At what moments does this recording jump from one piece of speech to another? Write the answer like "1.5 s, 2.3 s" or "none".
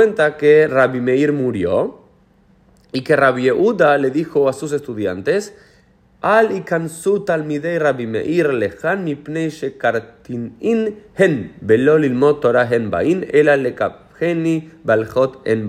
none